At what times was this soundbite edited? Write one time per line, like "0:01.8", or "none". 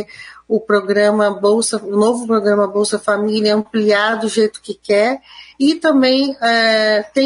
none